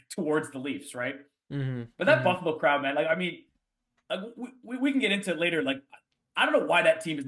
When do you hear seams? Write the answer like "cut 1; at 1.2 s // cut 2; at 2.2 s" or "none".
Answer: none